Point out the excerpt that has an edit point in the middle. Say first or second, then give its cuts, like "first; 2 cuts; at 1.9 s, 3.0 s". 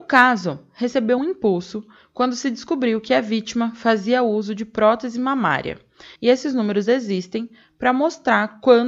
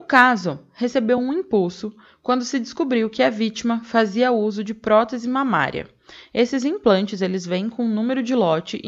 first; 2 cuts; at 1.2 s, 6.2 s